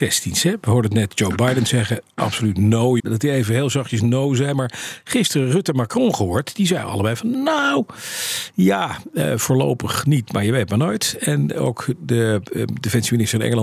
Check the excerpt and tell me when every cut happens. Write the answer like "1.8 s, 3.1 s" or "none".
3.0 s